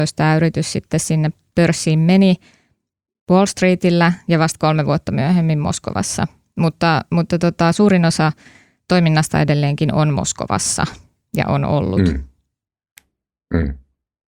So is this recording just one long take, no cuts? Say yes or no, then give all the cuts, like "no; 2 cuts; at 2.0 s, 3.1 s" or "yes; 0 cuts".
yes; 0 cuts